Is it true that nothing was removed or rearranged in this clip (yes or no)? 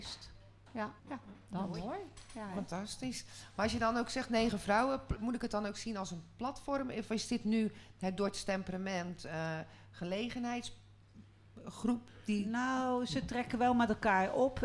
no